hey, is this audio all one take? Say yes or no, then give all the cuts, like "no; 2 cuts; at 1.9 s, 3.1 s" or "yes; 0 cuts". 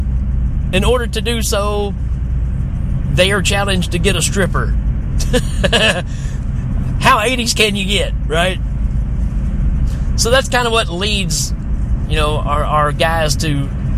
yes; 0 cuts